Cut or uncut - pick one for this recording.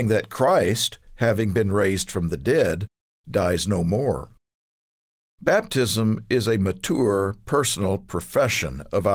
uncut